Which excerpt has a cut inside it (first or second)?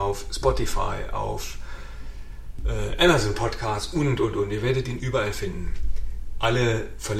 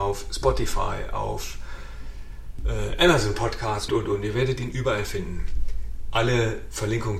second